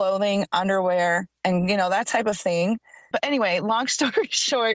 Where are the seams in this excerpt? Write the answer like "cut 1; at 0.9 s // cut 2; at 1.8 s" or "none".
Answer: cut 1; at 3.1 s

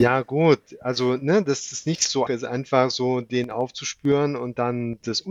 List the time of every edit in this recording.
cut 1; at 2.3 s

